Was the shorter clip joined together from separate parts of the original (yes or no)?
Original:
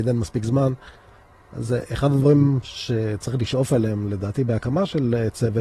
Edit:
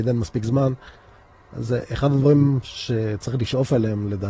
no